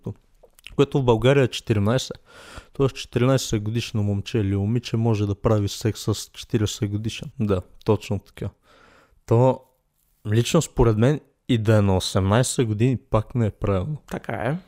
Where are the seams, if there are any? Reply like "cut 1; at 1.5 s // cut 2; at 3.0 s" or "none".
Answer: cut 1; at 7.3 s